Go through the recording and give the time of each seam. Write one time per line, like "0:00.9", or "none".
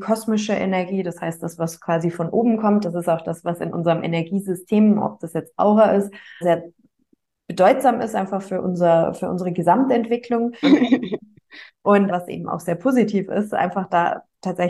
0:06.4
0:10.6
0:12.1